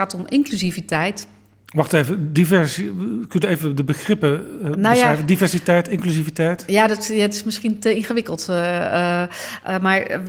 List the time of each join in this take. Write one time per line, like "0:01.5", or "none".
none